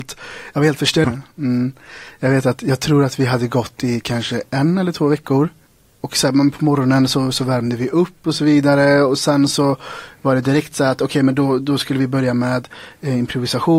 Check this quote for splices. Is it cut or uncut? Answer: cut